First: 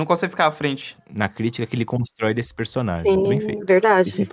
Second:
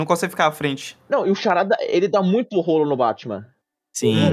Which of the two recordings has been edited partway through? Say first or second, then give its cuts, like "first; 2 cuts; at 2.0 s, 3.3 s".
first; 2 cuts; at 1.0 s, 3.3 s